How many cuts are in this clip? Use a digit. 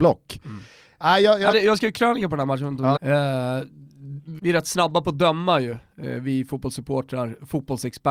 3